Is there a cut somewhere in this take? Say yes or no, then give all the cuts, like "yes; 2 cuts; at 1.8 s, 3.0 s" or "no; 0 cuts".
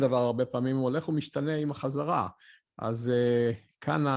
no; 0 cuts